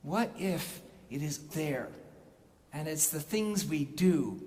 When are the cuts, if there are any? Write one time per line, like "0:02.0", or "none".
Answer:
0:01.5

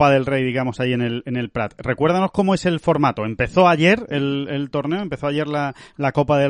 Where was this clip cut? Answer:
none

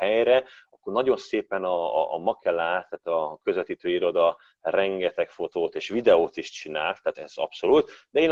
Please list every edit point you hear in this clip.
0:07.1

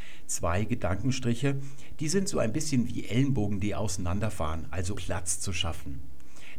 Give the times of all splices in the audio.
0:04.9

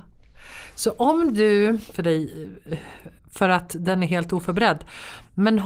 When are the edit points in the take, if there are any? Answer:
0:01.9
0:03.2

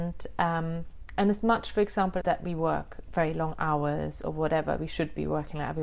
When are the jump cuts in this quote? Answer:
0:02.2

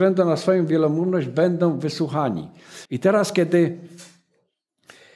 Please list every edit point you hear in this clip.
0:02.9

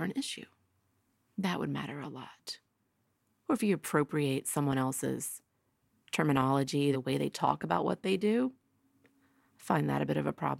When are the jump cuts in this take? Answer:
0:06.9

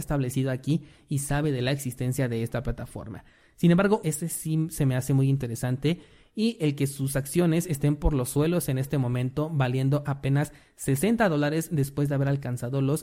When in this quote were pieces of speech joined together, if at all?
0:04.0

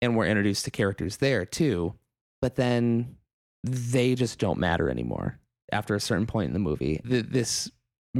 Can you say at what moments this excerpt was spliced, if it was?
0:07.0

